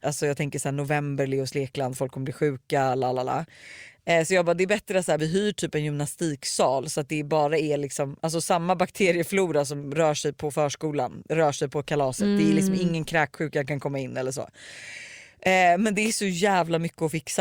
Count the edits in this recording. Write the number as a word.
one